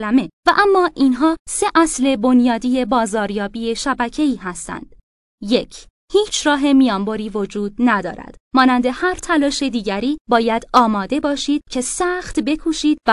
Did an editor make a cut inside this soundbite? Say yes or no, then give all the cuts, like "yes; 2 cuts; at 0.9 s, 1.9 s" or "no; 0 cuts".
no; 0 cuts